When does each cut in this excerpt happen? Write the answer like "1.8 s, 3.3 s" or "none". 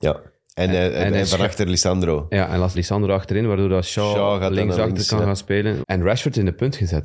2.7 s, 5.8 s